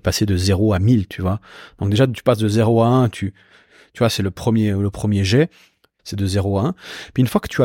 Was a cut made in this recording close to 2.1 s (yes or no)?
no